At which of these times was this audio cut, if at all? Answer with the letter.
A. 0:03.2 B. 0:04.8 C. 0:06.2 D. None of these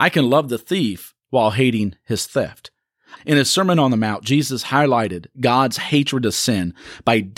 A